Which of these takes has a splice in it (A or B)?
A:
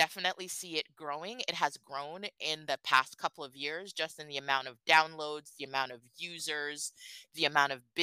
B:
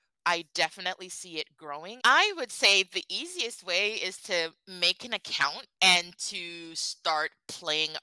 B